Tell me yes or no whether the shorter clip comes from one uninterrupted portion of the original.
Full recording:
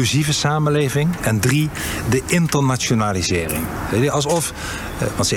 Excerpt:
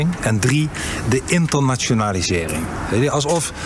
yes